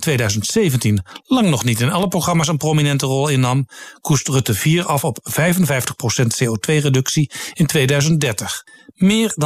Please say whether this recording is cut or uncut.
uncut